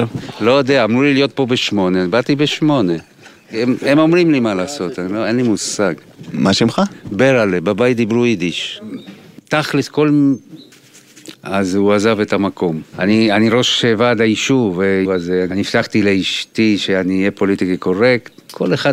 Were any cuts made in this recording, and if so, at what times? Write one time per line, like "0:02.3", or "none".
0:11.3
0:12.9
0:15.0